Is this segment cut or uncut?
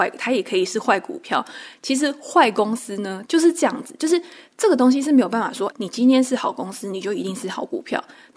cut